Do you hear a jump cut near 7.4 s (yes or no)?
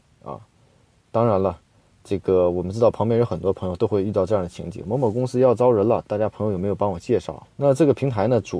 yes